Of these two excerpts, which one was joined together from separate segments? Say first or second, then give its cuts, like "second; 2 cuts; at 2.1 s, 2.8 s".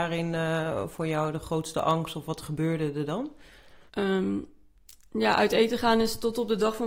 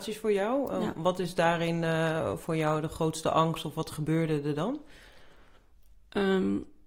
first; 1 cut; at 3.9 s